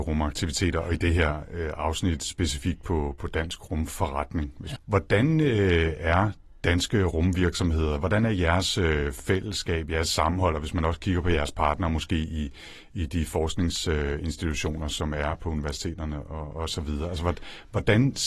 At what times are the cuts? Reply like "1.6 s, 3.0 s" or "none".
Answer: 4.8 s